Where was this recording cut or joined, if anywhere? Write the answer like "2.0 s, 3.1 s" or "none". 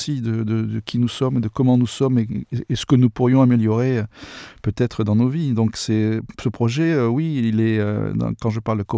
none